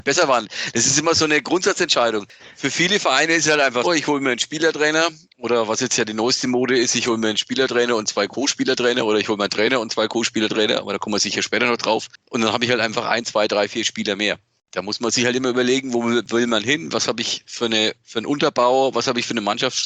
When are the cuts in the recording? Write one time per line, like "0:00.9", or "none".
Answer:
0:03.8